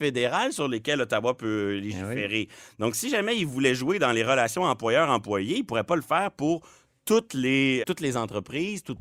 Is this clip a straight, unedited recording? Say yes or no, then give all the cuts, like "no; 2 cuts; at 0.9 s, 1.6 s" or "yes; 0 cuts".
no; 1 cut; at 7.8 s